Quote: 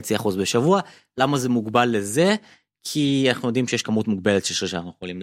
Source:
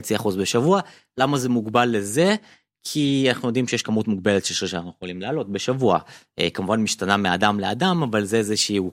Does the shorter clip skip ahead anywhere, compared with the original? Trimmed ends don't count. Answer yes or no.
no